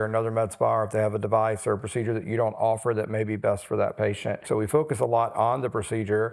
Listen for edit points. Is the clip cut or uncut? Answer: cut